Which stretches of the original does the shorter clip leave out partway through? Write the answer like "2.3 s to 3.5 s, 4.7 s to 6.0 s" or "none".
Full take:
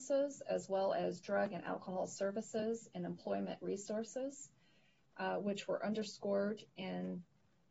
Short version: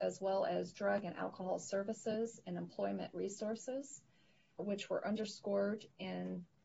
5.1 s to 5.4 s